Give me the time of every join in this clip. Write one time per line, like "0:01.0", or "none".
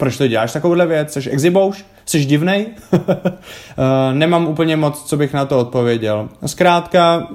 none